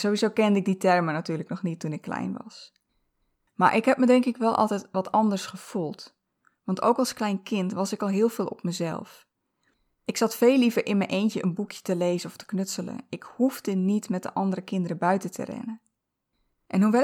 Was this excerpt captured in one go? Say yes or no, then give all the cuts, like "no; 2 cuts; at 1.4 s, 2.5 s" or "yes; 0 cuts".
yes; 0 cuts